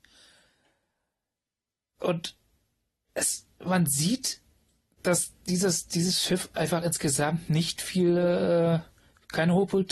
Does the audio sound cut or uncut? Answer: uncut